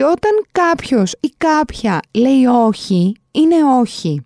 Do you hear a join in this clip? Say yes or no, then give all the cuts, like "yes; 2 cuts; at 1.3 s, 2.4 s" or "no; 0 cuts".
no; 0 cuts